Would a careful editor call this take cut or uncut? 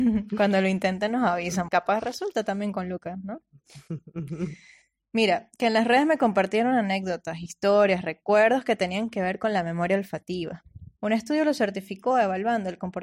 cut